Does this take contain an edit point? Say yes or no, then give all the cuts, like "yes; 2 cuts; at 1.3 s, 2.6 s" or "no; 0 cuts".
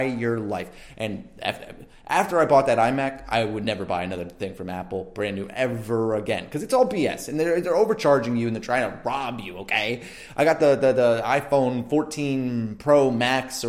no; 0 cuts